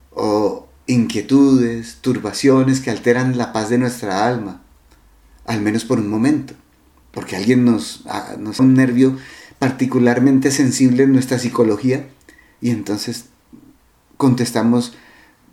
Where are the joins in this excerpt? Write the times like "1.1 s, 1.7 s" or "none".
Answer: 7.0 s, 8.6 s